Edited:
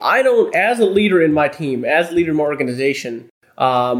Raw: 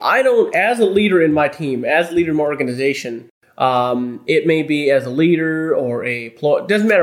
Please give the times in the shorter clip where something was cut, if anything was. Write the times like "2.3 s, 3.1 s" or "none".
none